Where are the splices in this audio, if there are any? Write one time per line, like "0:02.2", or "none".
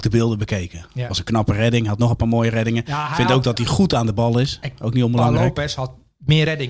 none

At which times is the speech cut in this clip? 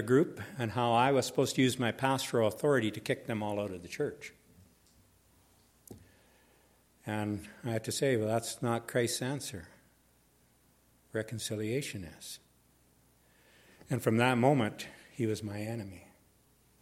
none

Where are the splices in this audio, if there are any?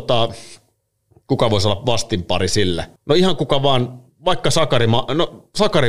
0:03.0

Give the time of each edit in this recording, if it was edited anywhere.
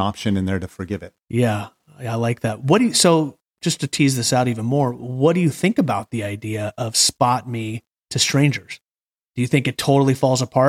0:01.2

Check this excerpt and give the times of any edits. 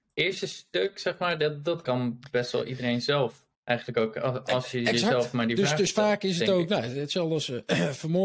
0:03.5

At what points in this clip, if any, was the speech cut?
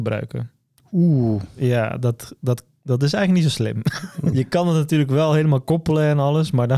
0:04.3

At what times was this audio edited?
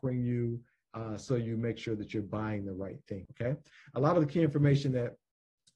0:03.3

